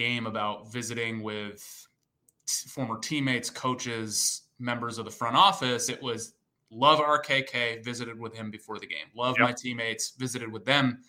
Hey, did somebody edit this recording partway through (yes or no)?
no